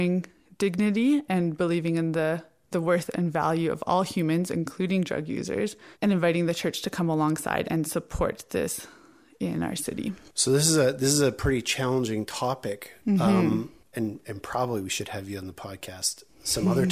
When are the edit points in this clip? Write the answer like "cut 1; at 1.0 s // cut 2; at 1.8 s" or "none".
cut 1; at 7.6 s // cut 2; at 13.9 s